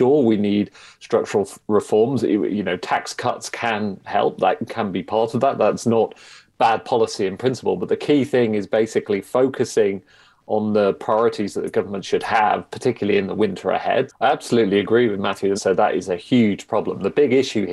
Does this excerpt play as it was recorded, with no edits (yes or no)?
no